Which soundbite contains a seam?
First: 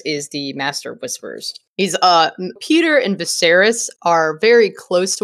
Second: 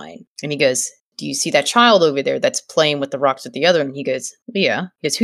first; 1 cut; at 2.6 s

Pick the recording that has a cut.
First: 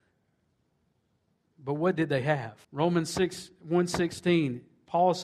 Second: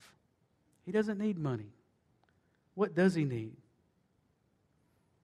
first; 1 cut; at 2.6 s

